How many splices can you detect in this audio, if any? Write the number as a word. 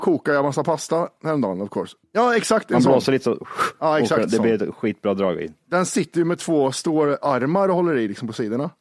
one